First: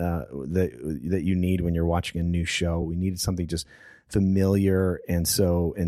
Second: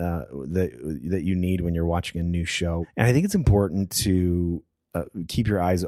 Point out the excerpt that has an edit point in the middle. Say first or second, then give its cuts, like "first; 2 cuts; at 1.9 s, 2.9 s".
second; 1 cut; at 2.8 s